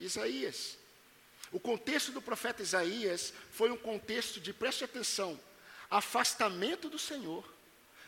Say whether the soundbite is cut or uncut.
uncut